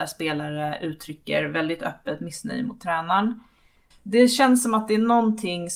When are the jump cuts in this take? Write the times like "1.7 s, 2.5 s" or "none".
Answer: 3.9 s